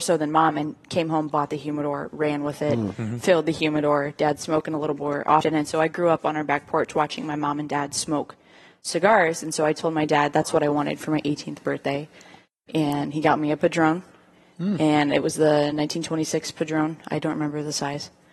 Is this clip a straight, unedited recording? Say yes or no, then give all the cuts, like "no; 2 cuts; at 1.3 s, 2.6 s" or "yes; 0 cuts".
yes; 0 cuts